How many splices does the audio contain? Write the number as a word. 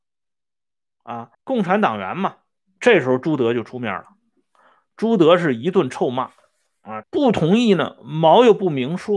three